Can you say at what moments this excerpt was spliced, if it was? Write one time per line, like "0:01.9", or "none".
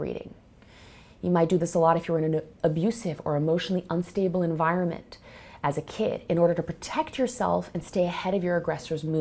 none